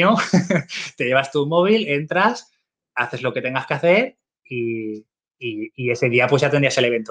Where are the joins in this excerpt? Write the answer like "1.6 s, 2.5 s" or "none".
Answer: none